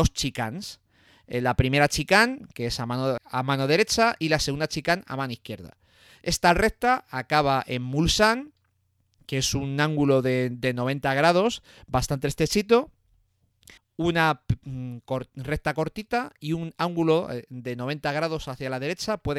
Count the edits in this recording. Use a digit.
2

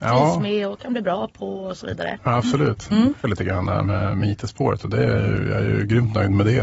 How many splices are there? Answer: 1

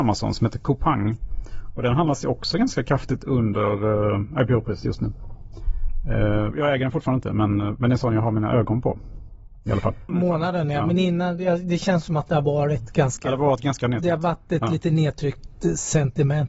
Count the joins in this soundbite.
2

